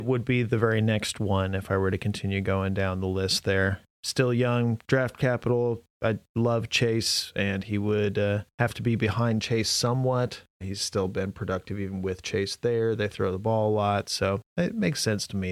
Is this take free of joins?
yes; 0 cuts

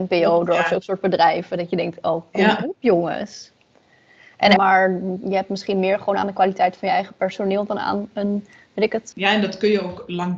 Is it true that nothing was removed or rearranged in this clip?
no; 2 cuts; at 4.6 s, 9.1 s

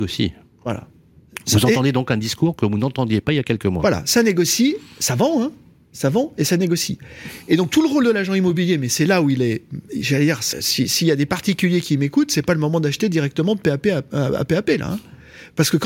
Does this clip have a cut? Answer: yes; 1 cut; at 10.5 s

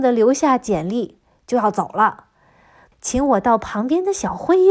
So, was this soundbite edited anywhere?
yes; 1 cut; at 2.9 s

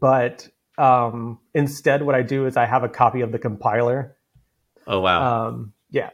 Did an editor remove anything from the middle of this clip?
yes; 1 cut; at 4.8 s

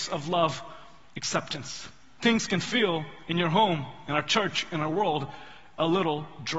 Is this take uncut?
yes; 0 cuts

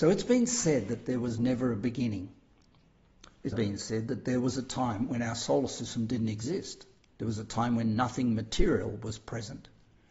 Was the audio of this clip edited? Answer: yes; 2 cuts; at 3.5 s, 7.1 s

